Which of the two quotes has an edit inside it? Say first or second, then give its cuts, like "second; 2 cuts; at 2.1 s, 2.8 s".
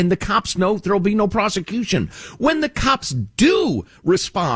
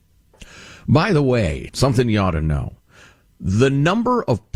second; 1 cut; at 1.7 s